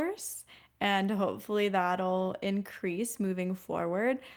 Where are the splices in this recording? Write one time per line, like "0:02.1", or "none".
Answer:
none